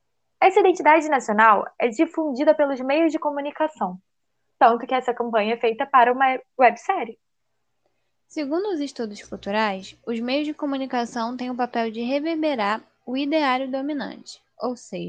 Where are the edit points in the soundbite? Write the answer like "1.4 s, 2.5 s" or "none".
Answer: none